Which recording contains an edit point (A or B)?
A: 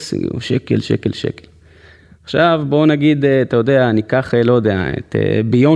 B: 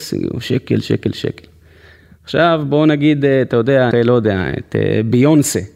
B